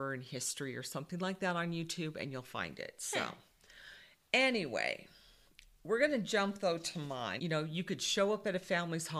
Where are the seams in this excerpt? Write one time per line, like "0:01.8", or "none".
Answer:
0:07.4

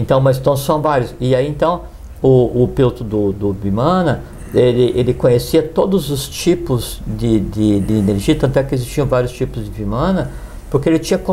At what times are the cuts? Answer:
none

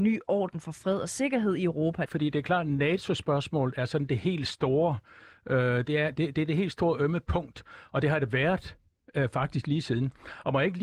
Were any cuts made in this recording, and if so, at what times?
0:02.1

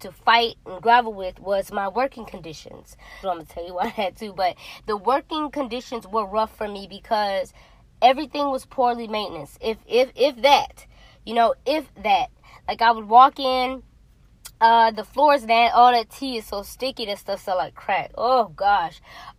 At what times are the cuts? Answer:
0:03.2

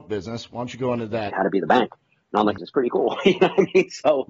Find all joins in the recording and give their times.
0:01.3
0:02.6

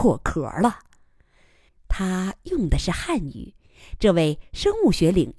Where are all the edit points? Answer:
0:01.7

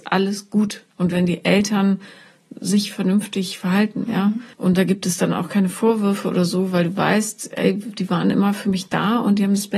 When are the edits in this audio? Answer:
0:04.5

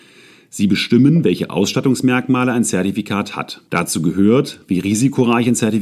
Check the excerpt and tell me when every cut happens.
0:03.7

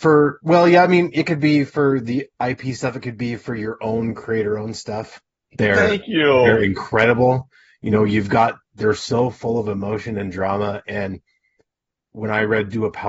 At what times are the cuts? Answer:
0:05.4

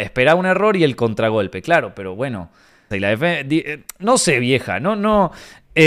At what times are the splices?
0:02.9

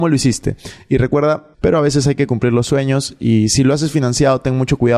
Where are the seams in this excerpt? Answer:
0:01.5

